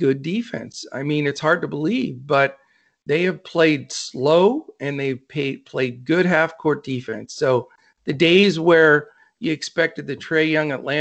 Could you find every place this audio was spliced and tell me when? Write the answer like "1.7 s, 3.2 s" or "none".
none